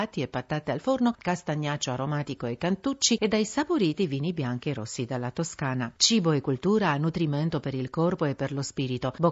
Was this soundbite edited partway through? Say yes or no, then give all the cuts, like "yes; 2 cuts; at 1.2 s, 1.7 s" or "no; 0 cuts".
yes; 1 cut; at 1.1 s